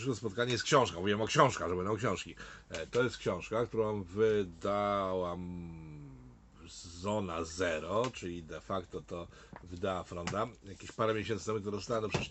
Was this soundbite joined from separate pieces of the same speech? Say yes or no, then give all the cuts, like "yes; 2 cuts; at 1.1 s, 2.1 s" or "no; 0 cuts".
no; 0 cuts